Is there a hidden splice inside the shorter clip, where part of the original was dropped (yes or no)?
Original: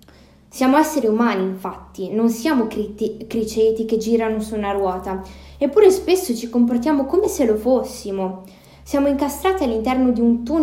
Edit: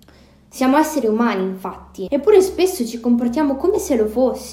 yes